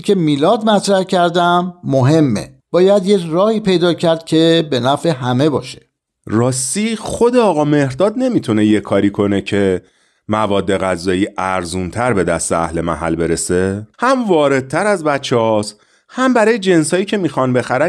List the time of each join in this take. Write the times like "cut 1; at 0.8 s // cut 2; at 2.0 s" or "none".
cut 1; at 2.6 s // cut 2; at 13.9 s